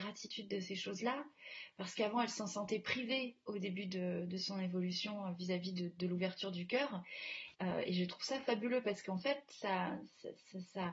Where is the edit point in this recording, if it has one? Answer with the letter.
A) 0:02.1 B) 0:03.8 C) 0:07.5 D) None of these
C